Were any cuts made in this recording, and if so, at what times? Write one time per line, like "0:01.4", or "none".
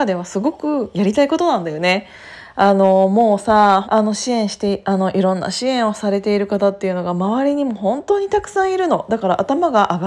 0:03.8